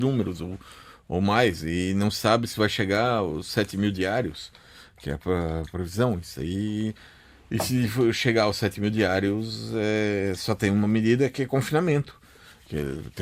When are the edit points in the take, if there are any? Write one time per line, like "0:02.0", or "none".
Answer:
none